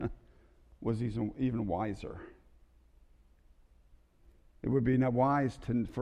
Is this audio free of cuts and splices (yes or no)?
yes